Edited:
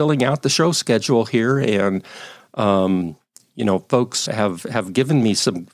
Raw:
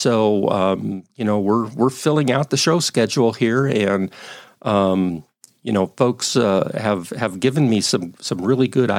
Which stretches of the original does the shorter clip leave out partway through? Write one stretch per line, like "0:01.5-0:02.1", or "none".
0:06.3-0:06.7